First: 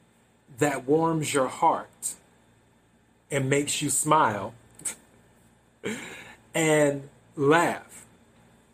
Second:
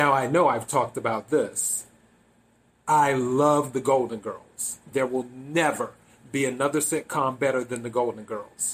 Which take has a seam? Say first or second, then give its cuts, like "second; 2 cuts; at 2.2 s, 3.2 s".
second; 1 cut; at 4.9 s